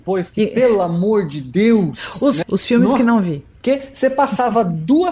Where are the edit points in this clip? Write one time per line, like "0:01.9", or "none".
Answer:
0:02.4